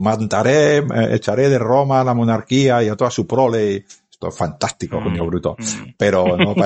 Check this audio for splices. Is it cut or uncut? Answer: uncut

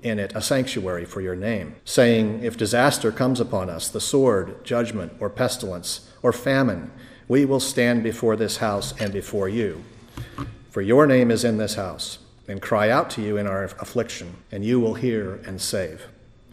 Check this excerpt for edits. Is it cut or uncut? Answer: cut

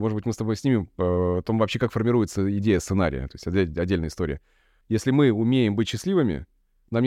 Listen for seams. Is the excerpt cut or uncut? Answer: cut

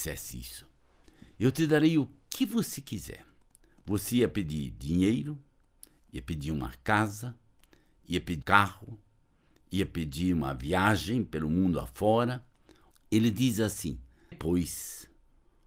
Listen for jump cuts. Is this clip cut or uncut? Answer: cut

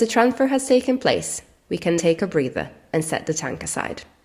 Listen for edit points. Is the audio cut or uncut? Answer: cut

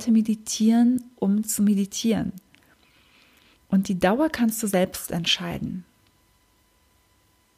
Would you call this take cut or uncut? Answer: uncut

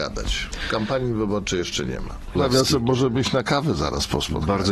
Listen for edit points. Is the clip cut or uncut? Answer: cut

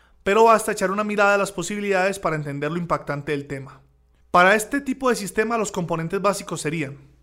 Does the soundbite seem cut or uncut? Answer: cut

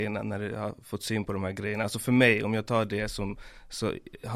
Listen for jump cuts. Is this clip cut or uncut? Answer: uncut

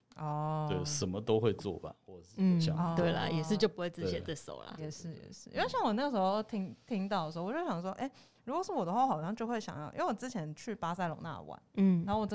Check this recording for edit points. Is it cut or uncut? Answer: uncut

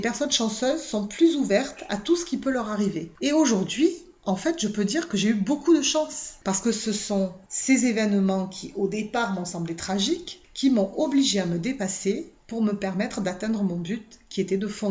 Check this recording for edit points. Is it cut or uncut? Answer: cut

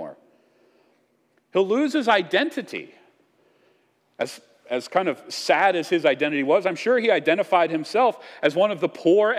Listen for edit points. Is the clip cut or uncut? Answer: uncut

